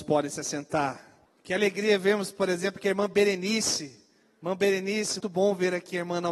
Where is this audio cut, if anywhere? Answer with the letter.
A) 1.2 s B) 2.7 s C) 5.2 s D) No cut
C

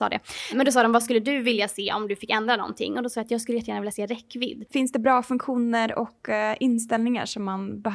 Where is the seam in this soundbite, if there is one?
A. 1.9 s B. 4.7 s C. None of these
B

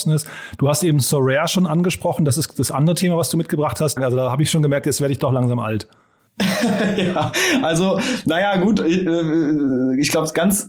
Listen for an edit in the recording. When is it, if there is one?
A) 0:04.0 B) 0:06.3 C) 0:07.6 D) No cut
A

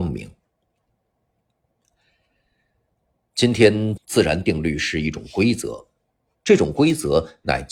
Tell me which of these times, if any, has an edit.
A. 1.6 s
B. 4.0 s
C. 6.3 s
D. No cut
B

